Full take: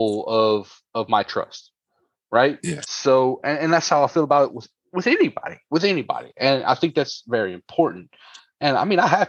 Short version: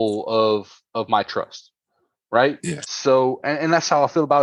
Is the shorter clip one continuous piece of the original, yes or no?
yes